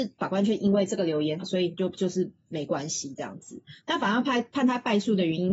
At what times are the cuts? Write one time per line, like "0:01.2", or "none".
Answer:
0:01.4
0:03.8